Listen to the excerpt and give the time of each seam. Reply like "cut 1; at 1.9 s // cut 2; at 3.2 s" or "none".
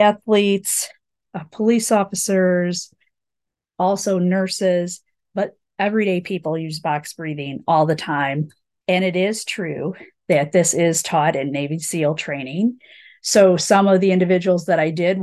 cut 1; at 8.8 s